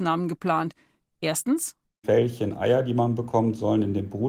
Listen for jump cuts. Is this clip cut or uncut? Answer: uncut